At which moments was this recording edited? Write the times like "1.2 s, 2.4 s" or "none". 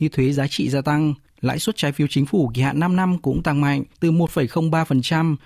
1.3 s, 3.9 s